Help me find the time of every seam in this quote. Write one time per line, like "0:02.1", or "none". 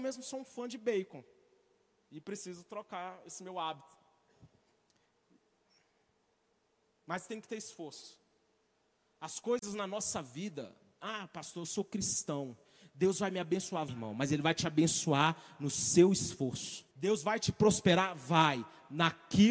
0:13.9
0:16.9

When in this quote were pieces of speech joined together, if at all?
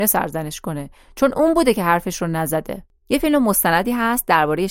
0:03.1

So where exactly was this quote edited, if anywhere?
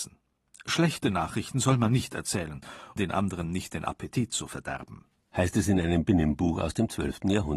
0:03.0

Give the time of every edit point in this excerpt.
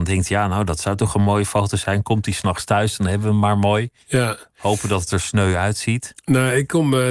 0:04.0

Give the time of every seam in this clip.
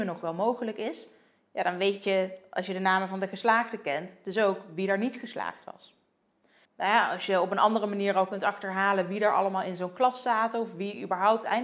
0:06.6

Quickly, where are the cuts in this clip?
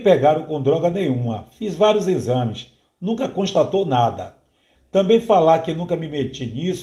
0:04.8

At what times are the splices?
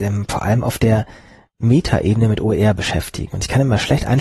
none

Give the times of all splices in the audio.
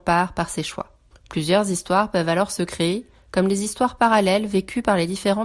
0:01.1

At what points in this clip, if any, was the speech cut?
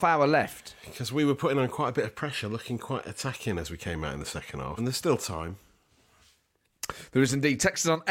0:04.8

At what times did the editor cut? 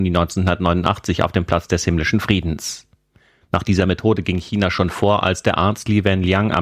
0:03.4

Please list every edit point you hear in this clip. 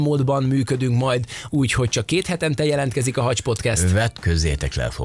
0:01.5

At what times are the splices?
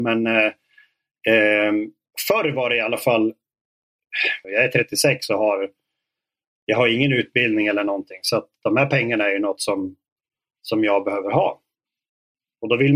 0:04.4

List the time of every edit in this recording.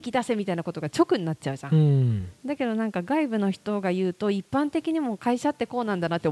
none

